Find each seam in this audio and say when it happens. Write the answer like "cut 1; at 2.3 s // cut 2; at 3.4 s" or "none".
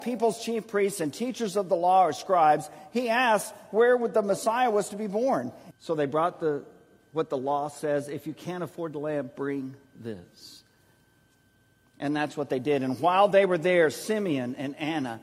cut 1; at 5.7 s